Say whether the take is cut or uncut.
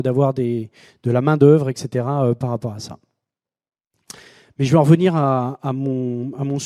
uncut